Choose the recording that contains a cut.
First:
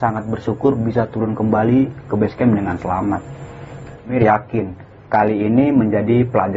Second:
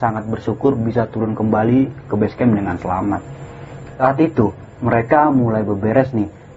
first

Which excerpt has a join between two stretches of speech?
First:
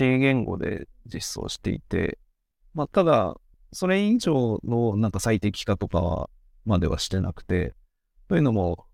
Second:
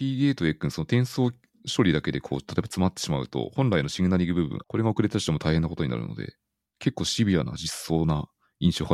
second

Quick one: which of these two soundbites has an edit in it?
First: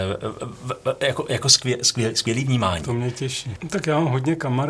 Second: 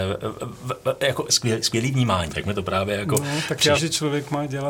second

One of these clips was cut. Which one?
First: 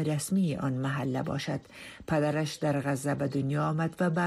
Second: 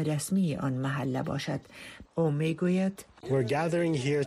second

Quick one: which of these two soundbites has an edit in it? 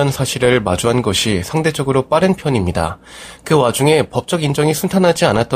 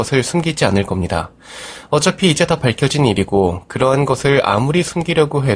first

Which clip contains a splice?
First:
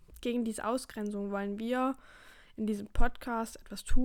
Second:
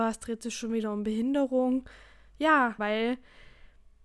second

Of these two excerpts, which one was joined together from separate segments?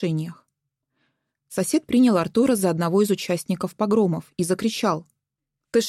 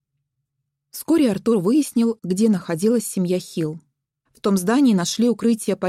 second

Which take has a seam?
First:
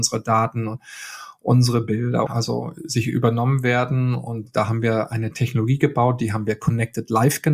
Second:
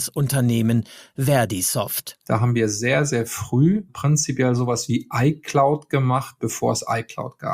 first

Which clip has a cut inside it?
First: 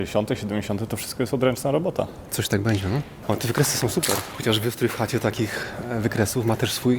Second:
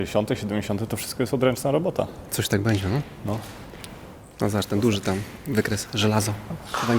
first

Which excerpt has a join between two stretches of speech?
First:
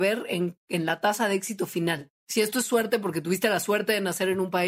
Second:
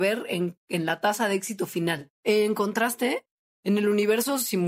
second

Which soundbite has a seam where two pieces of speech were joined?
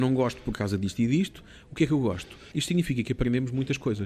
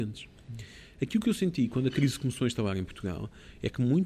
first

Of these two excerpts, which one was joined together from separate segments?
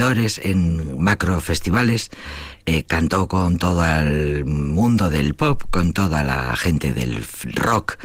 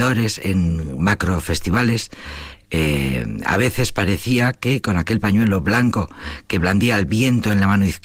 second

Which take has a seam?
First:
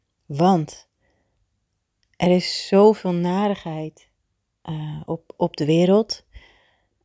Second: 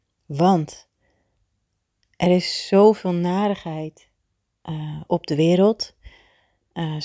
second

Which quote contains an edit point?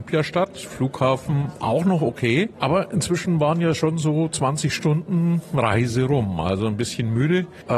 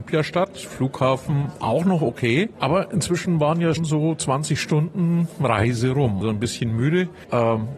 second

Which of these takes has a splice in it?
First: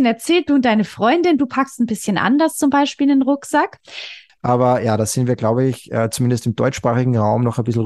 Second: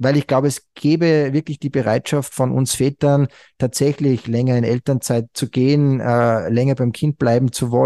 first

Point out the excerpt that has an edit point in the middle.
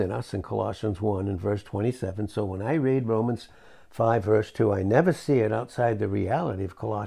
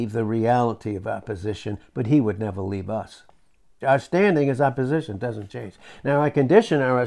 second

